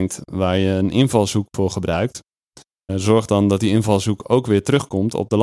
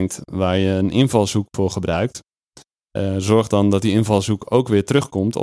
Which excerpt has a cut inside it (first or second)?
first